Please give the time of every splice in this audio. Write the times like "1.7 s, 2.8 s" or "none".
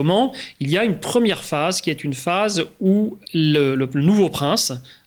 3.2 s